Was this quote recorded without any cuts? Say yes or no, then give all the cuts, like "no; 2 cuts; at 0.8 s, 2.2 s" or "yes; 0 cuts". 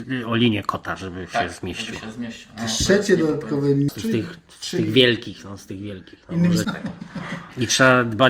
no; 2 cuts; at 3.9 s, 6.6 s